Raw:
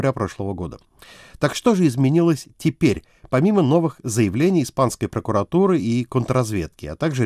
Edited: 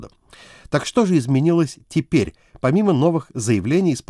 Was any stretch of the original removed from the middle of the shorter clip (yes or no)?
no